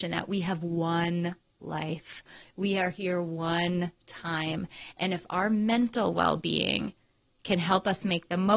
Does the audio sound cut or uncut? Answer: uncut